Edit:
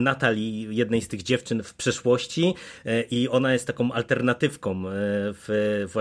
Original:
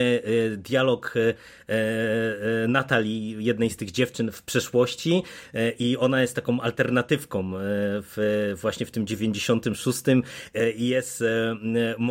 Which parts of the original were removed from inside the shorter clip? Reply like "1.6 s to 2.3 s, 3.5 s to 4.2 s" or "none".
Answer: none